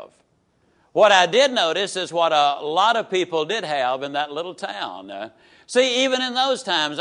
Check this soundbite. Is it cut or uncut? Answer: uncut